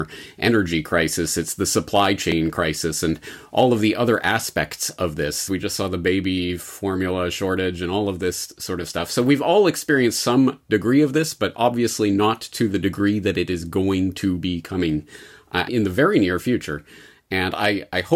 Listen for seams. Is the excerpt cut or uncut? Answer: cut